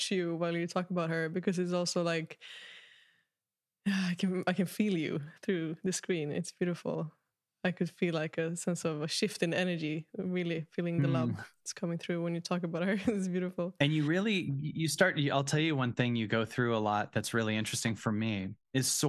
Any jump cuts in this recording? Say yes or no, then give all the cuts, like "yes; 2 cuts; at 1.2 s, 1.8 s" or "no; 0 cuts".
no; 0 cuts